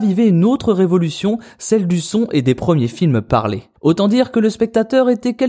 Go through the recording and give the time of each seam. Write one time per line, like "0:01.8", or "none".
none